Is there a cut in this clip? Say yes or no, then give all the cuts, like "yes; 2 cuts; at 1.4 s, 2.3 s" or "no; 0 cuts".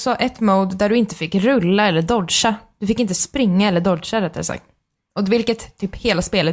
no; 0 cuts